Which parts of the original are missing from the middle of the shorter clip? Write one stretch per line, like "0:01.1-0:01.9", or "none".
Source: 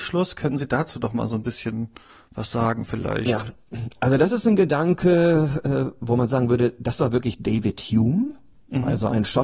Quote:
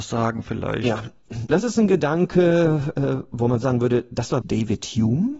0:03.9-0:04.2
0:07.1-0:07.4

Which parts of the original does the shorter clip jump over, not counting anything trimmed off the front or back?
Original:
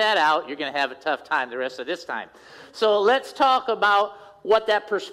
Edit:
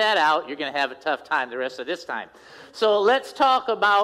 none

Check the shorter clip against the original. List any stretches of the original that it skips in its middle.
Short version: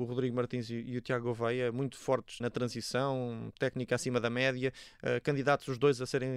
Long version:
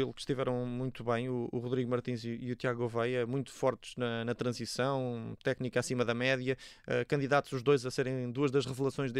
0:03.9-0:04.2

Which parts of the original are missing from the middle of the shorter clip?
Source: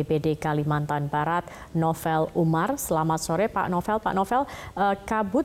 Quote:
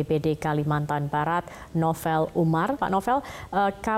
0:02.8-0:04.0

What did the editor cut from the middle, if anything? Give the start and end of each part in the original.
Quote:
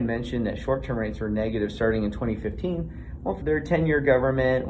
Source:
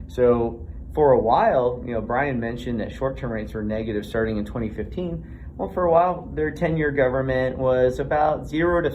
0:05.7-0:06.3

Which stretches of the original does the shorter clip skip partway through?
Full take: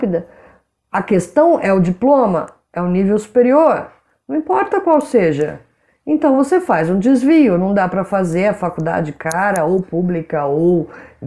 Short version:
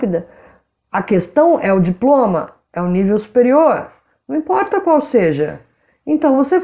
none

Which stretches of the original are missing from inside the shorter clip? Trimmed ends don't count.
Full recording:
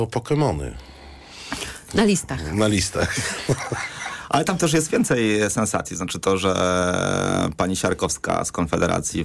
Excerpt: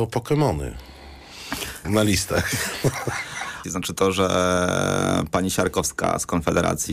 0:01.8-0:02.5
0:04.3-0:05.9

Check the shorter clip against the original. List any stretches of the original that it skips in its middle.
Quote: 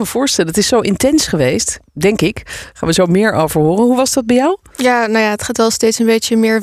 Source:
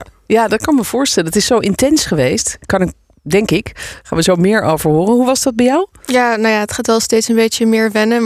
0:02.6-0:03.1

